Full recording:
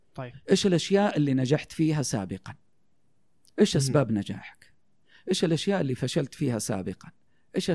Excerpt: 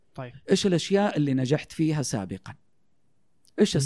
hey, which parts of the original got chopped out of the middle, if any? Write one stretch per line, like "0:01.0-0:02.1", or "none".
none